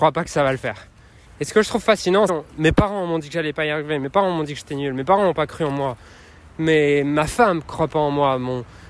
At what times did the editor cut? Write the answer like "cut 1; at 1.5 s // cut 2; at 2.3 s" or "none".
cut 1; at 1.3 s // cut 2; at 2.3 s